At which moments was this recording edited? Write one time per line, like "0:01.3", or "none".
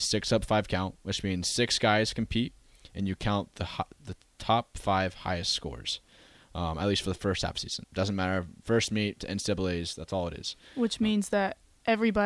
0:07.8